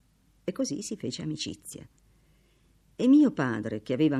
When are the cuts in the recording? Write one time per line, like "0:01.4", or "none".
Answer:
none